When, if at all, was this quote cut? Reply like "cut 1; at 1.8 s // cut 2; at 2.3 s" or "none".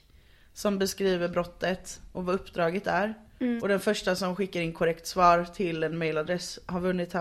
cut 1; at 3.6 s